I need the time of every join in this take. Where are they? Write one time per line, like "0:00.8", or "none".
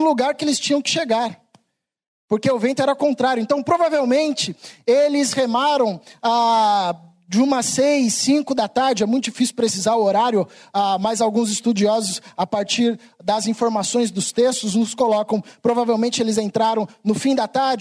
none